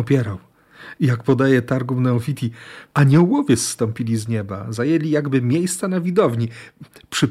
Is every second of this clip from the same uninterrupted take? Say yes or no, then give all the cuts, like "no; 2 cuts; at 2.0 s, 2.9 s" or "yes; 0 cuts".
yes; 0 cuts